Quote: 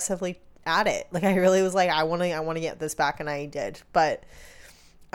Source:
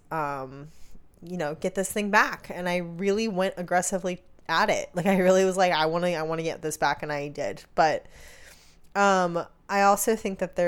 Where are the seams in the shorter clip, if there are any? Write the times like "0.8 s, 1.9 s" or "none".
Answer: none